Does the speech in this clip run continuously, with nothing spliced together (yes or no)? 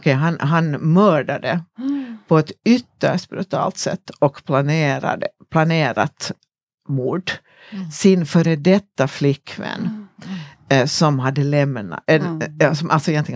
yes